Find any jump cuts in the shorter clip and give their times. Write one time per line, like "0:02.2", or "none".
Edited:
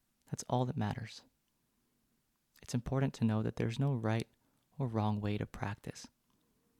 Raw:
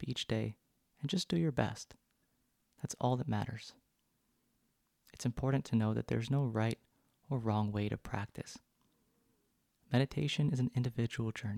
none